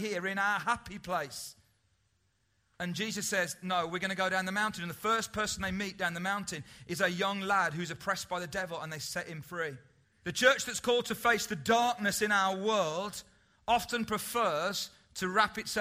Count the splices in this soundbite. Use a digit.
1